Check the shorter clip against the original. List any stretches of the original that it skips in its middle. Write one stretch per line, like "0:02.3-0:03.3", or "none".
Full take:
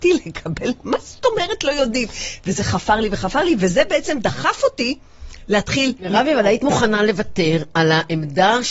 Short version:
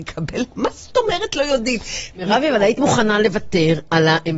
0:02.4-0:06.0